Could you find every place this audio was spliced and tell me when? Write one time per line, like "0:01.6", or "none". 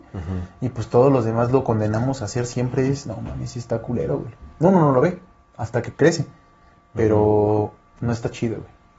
none